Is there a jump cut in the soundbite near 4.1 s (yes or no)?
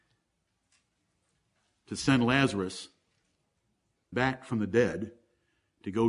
yes